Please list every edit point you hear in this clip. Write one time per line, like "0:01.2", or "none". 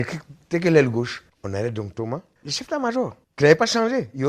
0:01.3